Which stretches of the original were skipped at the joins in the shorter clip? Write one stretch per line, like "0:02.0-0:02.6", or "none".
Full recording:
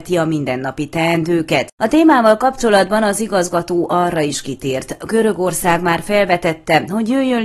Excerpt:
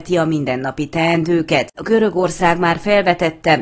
0:01.7-0:05.0

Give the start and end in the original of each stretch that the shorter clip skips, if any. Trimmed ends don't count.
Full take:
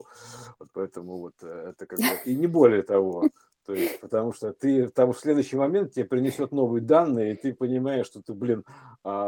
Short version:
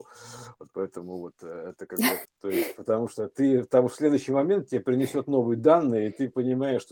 0:02.2-0:03.5

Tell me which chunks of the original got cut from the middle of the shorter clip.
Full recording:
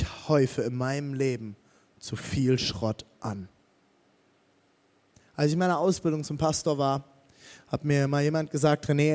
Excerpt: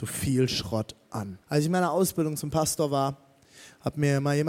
0:03.5-0:05.3

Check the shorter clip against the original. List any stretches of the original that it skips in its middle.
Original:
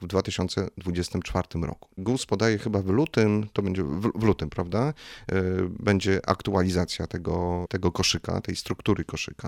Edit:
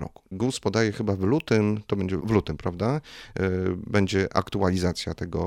0:03.9-0:04.1

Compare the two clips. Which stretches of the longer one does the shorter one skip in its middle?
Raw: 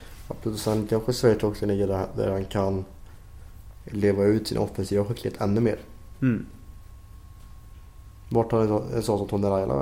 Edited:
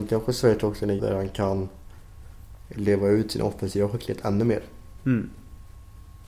0:01.8-0:02.1

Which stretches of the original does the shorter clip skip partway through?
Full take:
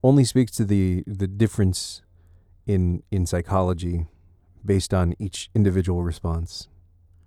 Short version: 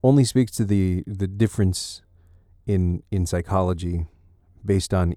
none

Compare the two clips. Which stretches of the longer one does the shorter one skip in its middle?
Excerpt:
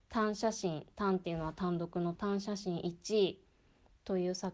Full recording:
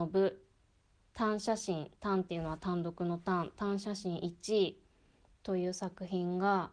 0:03.2-0:03.5

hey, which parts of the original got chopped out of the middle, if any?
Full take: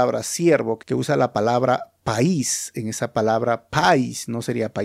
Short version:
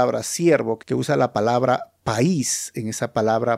none

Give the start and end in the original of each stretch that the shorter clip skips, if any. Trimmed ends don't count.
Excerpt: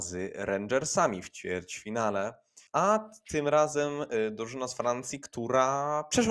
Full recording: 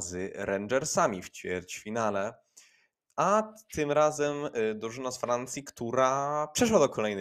0:02.7-0:03.1

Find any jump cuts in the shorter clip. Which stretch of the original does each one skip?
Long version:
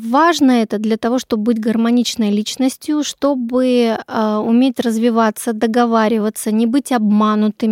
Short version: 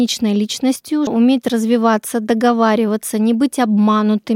0:03.0-0:04.4

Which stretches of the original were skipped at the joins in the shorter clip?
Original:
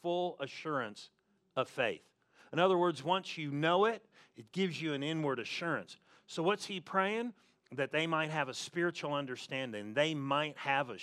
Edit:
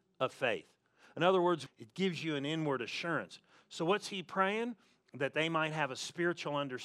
0:03.0-0:04.2

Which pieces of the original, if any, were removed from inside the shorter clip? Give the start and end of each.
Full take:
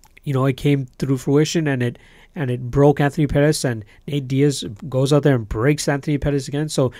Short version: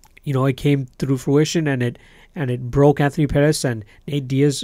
none

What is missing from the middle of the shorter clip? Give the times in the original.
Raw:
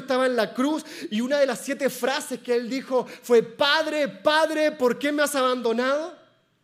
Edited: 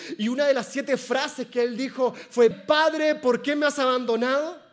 0:03.4-0:04.1

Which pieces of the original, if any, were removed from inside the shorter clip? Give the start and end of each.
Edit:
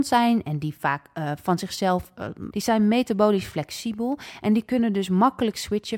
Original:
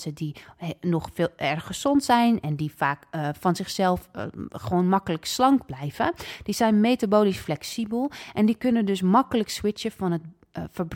0:04.5-0:06.4

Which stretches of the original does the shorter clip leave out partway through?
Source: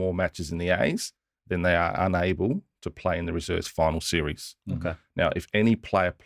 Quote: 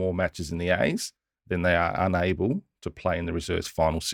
none

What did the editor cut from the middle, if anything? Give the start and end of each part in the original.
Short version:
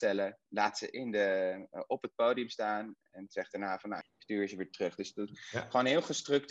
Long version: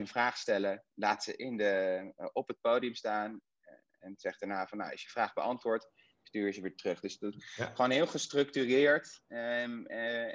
0:03.5-0:03.9
0:04.9-0:06.1

